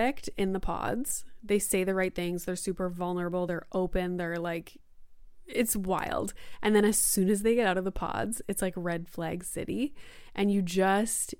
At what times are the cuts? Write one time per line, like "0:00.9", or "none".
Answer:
none